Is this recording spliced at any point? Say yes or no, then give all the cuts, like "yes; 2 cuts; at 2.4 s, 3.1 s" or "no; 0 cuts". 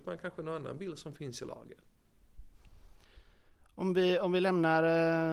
no; 0 cuts